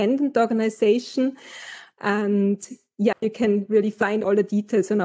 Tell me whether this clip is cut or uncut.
cut